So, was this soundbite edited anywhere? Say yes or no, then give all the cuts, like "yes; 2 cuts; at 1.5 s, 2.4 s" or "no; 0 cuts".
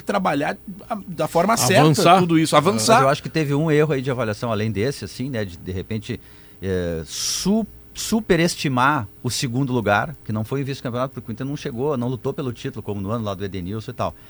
no; 0 cuts